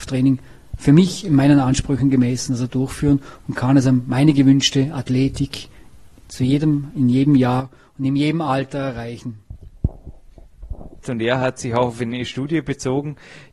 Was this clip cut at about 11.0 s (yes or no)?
yes